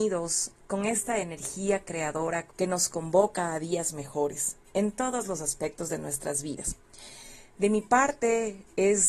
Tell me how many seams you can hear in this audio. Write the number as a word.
one